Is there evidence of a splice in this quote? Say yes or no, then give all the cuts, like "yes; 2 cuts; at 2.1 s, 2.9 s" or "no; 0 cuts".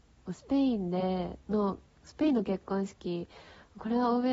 yes; 1 cut; at 1.4 s